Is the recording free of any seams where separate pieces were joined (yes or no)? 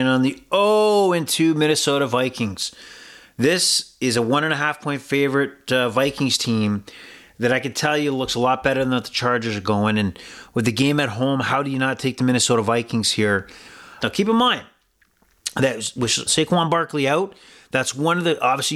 no